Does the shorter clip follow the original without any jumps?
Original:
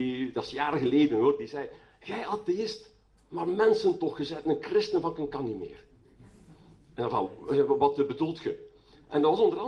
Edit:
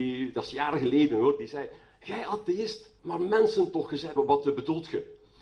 no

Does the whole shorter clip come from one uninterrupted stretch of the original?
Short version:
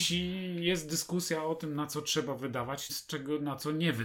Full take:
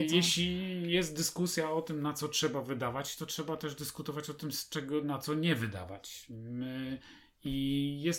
no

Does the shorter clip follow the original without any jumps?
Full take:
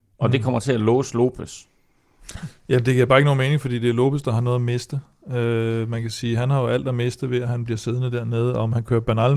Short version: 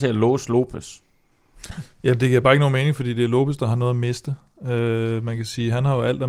yes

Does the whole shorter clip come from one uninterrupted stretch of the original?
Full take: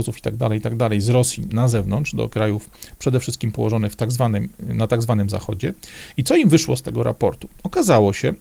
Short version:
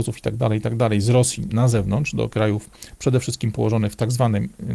yes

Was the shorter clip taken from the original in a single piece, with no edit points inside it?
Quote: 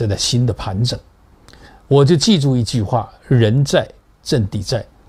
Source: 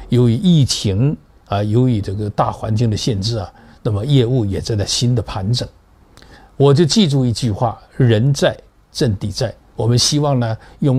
yes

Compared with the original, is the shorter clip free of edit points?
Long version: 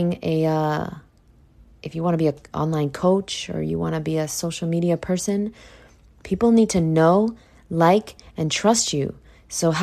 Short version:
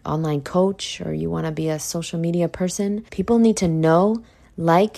no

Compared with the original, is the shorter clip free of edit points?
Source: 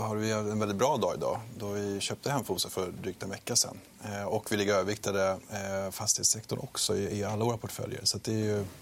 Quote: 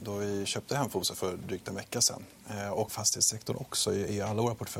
no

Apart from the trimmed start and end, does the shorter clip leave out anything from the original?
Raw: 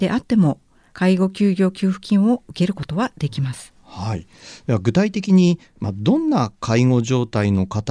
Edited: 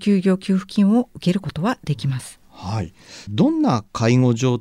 yes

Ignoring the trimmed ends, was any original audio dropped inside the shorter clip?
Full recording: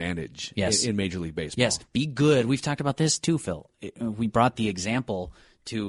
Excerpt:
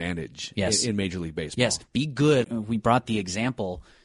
yes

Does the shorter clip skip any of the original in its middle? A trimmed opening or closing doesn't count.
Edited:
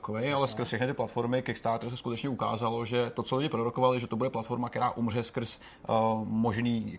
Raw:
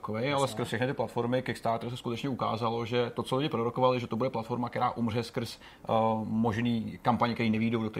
no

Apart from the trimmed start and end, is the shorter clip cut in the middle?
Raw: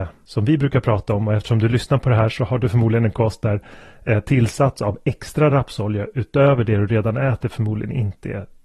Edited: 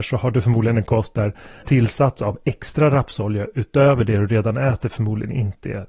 yes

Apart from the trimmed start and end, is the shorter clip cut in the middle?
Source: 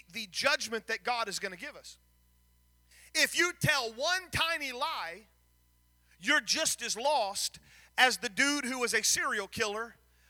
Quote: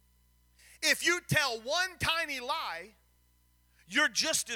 no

